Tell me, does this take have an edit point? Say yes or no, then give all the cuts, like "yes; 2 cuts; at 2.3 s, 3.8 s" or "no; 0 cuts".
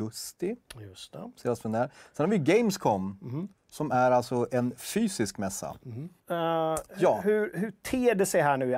yes; 2 cuts; at 3.5 s, 6.2 s